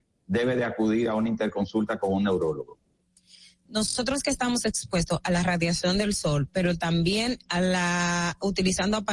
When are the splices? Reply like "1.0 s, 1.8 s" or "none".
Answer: 3.7 s